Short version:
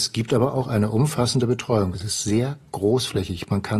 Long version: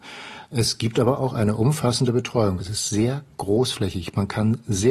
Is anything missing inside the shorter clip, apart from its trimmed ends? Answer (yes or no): no